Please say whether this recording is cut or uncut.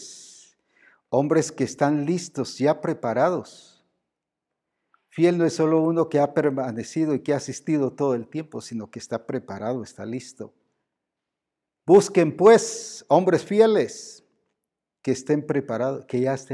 uncut